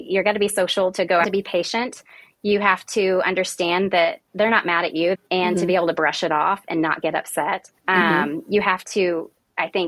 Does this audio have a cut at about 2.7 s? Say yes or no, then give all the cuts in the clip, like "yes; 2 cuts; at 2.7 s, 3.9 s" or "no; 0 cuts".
no; 3 cuts; at 1.2 s, 5.1 s, 7.8 s